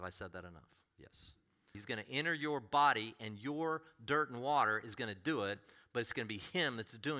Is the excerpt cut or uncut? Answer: cut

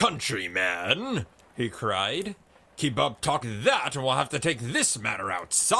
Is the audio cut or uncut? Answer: cut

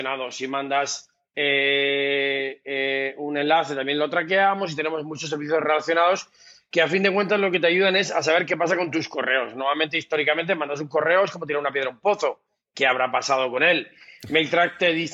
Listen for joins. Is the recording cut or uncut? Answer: uncut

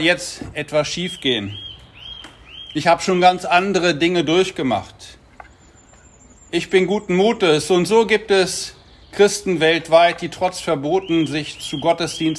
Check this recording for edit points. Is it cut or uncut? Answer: uncut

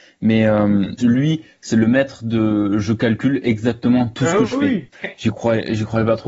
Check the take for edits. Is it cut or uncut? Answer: cut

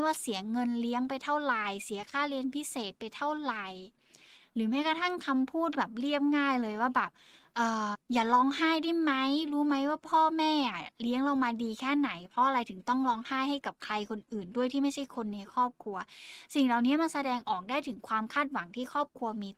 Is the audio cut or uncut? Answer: cut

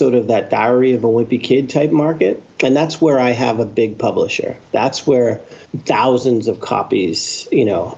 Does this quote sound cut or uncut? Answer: cut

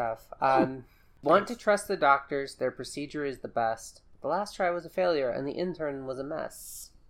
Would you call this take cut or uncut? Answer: uncut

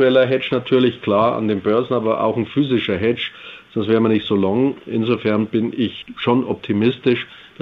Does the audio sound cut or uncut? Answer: uncut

